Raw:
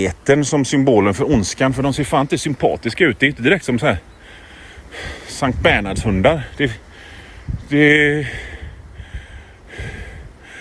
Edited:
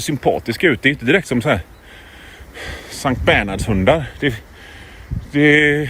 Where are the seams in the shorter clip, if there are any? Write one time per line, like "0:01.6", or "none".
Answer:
none